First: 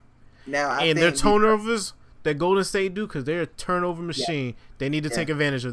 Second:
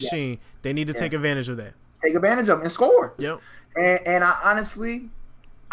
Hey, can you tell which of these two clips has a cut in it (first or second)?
second